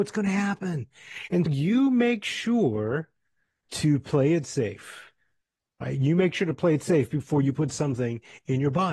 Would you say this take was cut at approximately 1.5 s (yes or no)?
yes